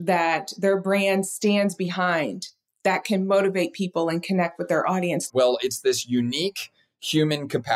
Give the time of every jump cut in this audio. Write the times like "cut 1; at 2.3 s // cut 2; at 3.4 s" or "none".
cut 1; at 5.3 s